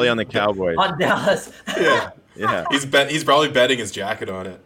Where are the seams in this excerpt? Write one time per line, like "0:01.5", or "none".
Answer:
none